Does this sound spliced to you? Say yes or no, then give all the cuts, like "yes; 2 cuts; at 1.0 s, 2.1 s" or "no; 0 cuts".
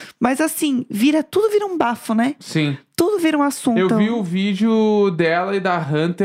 no; 0 cuts